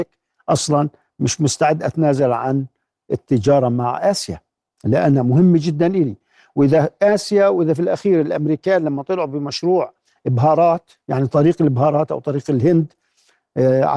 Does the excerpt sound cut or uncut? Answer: uncut